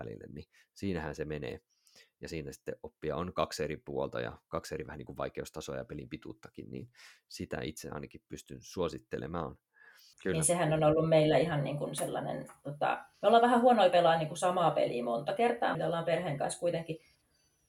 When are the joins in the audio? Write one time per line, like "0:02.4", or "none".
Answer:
0:10.1
0:13.1
0:15.7